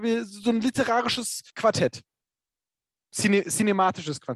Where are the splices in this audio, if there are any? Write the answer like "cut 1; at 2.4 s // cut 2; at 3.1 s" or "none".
cut 1; at 1.5 s